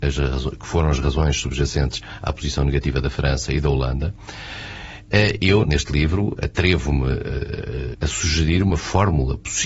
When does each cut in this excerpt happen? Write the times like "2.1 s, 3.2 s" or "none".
5.6 s, 7.9 s